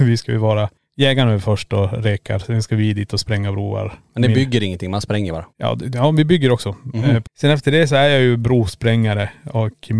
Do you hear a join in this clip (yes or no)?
yes